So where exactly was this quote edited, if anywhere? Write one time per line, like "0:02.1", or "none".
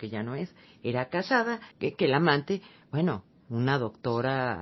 0:01.7